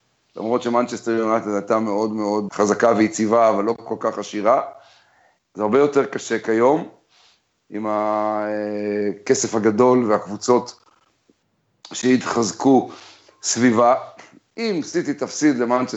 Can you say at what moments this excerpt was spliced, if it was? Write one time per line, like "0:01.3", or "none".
0:02.5
0:05.4
0:14.5